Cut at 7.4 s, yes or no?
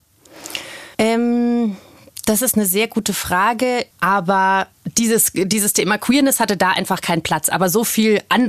no